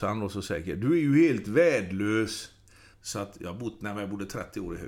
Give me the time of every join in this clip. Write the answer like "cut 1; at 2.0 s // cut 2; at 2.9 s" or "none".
cut 1; at 2.9 s

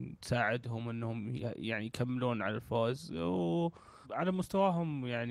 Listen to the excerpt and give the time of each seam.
cut 1; at 4.0 s

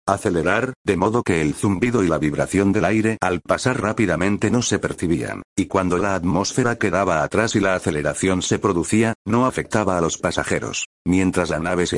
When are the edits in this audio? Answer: cut 1; at 5.5 s // cut 2; at 9.2 s // cut 3; at 10.9 s

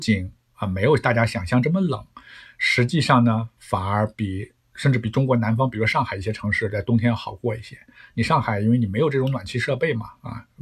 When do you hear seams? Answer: none

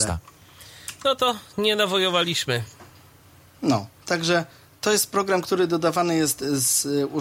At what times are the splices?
none

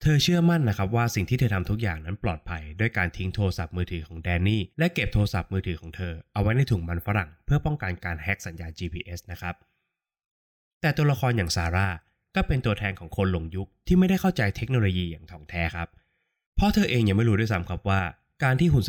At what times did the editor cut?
cut 1; at 4.7 s

